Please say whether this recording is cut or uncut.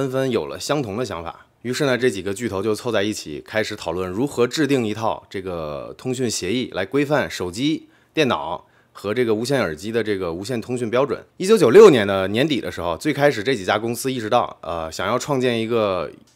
uncut